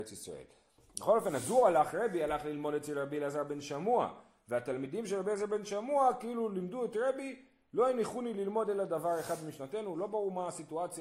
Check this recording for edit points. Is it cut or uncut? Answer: uncut